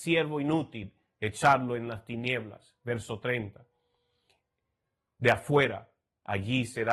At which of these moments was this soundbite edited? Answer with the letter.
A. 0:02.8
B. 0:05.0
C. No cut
C